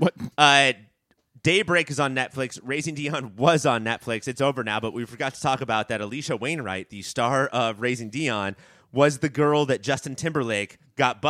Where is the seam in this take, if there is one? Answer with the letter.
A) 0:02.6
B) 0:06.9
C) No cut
C